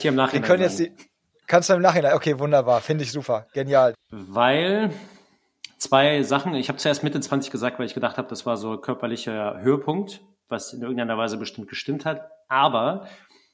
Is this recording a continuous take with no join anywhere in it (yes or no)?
no